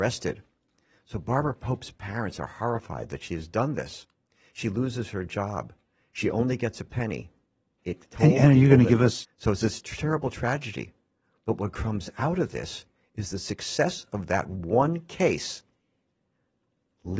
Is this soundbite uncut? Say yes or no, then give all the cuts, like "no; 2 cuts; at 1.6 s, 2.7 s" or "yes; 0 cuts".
no; 2 cuts; at 7.8 s, 9.2 s